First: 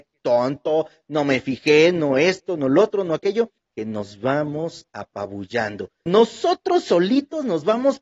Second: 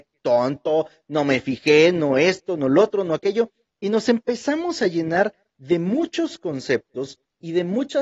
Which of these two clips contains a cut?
first; 2 cuts; at 3.6 s, 6.1 s

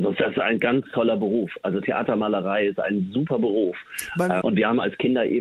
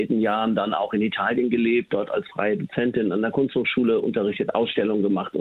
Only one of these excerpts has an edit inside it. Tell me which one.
first; 1 cut; at 4.4 s

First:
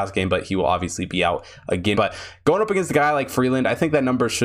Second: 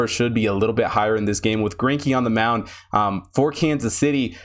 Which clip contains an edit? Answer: first; 1 cut; at 1.9 s

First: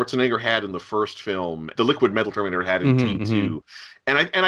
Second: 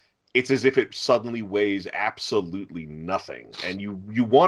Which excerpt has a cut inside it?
first; 1 cut; at 1.8 s

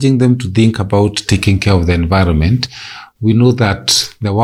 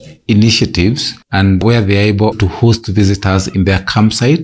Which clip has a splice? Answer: second; 2 cuts; at 1.2 s, 2.3 s

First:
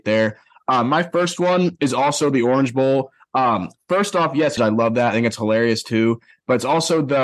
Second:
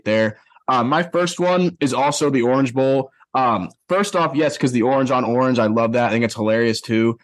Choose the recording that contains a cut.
first; 1 cut; at 4.6 s

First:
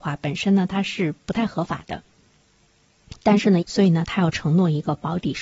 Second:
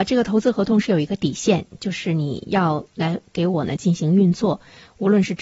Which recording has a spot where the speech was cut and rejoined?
first; 1 cut; at 3.6 s

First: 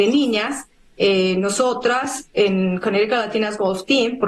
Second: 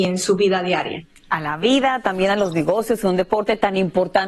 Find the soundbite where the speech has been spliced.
first; 1 cut; at 2.3 s

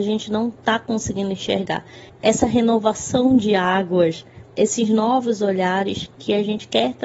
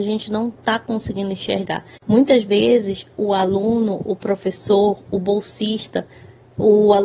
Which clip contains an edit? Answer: second; 1 cut; at 2.0 s

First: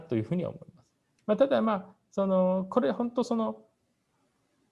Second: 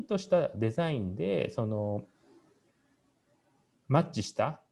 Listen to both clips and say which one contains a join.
first; 1 cut; at 1.2 s

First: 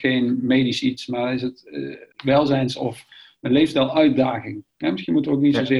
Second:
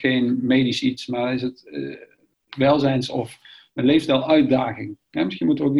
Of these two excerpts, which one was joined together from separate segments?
first; 1 cut; at 2.1 s

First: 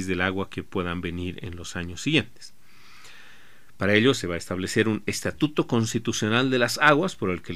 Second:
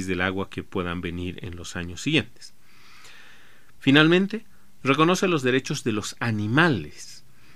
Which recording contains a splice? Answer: second; 2 cuts; at 3.8 s, 4.8 s

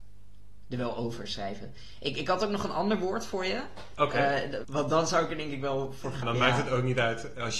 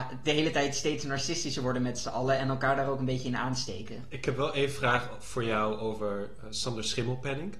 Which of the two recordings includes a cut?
first; 2 cuts; at 4.6 s, 6.2 s

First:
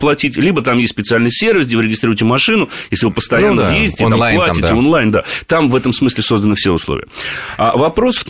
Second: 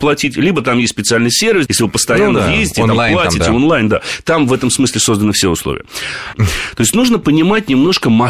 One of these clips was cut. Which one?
second; 2 cuts; at 1.7 s, 6.3 s

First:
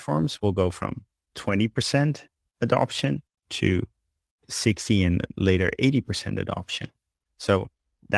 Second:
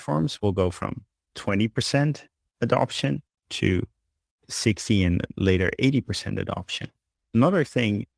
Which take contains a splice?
second; 1 cut; at 7.2 s

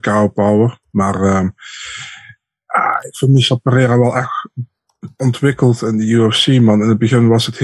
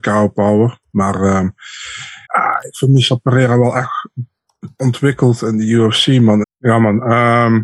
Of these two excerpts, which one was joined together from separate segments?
second; 2 cuts; at 2.2 s, 6.4 s

